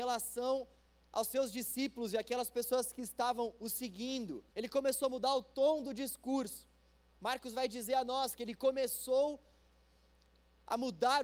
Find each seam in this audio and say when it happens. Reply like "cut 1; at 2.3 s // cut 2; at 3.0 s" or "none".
cut 1; at 4.5 s // cut 2; at 7.2 s